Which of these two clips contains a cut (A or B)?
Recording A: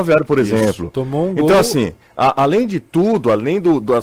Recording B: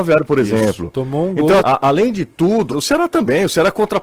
B